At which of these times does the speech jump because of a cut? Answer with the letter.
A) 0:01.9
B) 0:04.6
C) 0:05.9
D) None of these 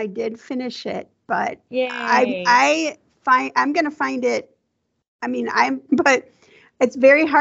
C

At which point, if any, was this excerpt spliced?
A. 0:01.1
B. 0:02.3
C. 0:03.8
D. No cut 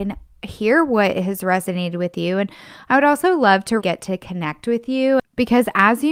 C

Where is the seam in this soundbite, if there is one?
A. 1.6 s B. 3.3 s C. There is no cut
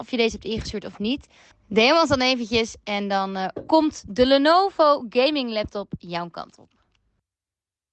C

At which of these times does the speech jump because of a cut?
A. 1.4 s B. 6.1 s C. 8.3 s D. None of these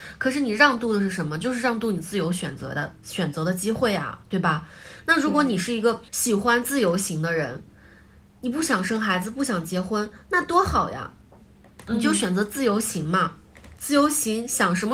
B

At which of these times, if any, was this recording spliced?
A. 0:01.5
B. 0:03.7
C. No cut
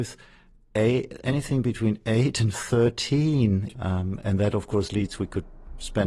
B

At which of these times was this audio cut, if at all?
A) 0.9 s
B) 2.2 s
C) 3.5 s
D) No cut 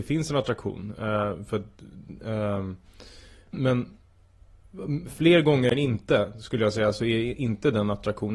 C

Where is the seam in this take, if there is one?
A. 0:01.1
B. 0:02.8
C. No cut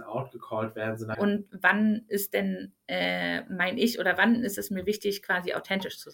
A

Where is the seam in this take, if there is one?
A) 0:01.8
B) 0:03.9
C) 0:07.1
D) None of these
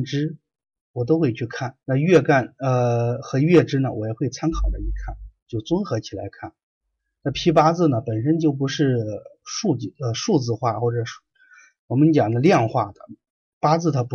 A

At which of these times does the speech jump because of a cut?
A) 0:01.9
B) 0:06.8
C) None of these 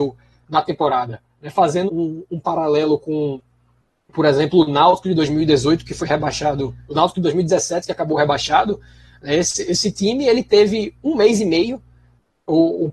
A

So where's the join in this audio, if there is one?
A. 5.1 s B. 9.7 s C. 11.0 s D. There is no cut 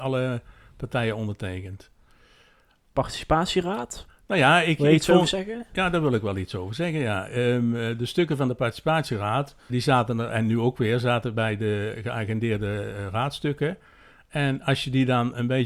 B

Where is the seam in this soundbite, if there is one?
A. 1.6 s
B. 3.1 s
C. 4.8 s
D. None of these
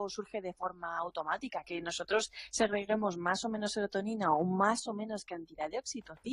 A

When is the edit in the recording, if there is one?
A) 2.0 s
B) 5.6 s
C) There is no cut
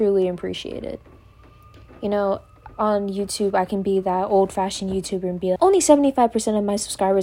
B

